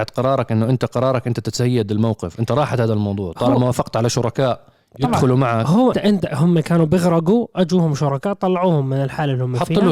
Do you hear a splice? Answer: yes; 1 cut; at 5.9 s

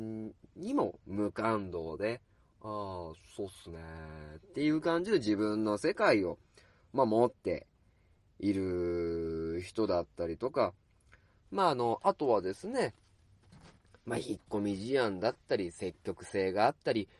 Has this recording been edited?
no; 0 cuts

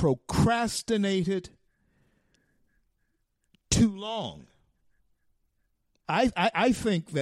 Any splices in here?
yes; 1 cut; at 6.0 s

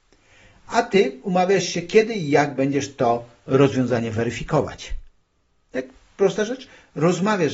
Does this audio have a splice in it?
no; 0 cuts

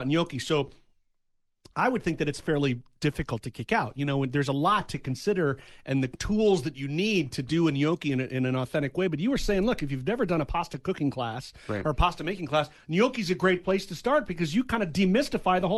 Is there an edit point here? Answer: no; 0 cuts

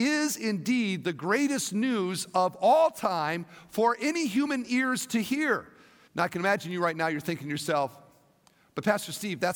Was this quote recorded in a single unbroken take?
no; 1 cut; at 6.1 s

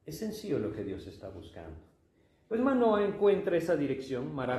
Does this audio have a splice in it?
no; 0 cuts

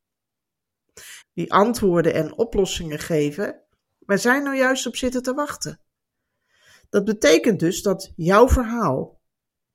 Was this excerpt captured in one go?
no; 1 cut; at 1.2 s

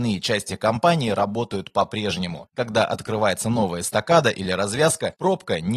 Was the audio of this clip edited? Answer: yes; 1 cut; at 2.5 s

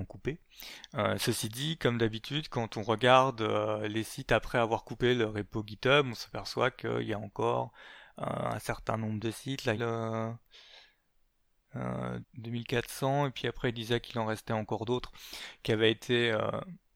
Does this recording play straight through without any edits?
no; 2 cuts; at 9.8 s, 12.2 s

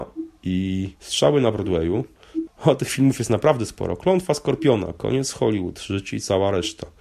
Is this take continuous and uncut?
no; 2 cuts; at 1.0 s, 2.5 s

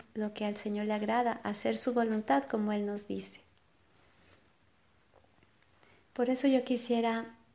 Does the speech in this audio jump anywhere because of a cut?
no; 0 cuts

